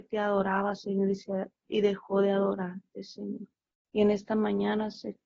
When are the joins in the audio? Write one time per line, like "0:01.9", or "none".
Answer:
0:03.8